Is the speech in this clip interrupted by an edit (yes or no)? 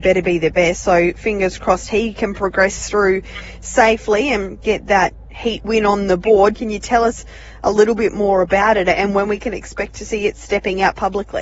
yes